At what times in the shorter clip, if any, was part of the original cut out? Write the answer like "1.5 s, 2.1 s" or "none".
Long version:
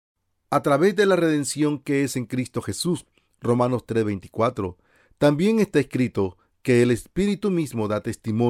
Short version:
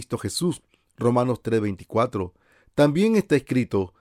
none